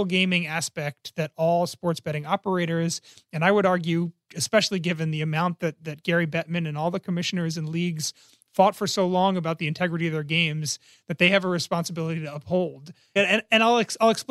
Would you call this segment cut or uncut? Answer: cut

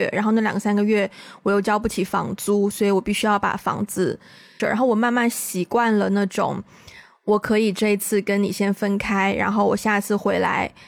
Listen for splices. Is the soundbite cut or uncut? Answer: cut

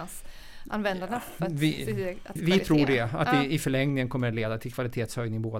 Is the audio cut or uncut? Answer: cut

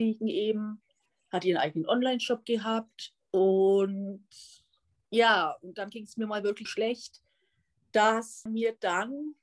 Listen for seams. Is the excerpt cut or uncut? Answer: cut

